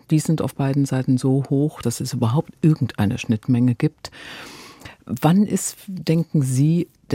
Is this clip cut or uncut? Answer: cut